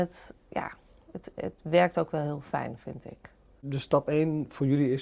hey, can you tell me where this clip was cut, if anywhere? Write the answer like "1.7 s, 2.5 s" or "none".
none